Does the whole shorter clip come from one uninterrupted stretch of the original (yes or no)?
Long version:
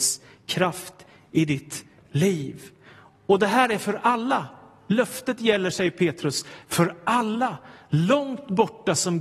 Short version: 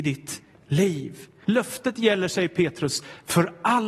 no